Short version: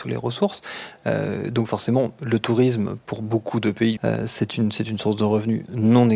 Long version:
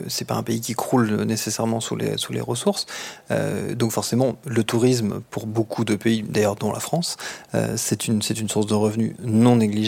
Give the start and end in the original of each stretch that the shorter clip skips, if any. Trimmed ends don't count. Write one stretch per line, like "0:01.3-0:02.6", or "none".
0:06.2-0:07.5